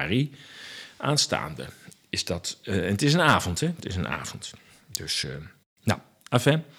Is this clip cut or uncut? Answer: uncut